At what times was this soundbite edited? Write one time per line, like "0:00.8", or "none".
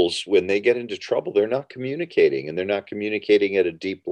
none